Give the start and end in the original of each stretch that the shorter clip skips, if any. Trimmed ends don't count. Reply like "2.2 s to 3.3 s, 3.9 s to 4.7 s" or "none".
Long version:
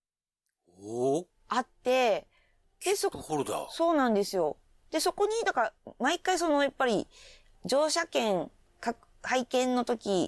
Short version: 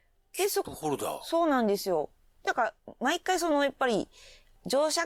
4.9 s to 5.4 s